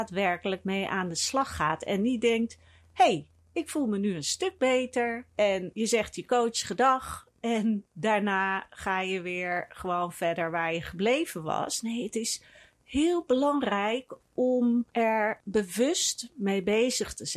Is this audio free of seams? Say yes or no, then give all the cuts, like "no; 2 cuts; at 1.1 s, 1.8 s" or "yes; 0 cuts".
yes; 0 cuts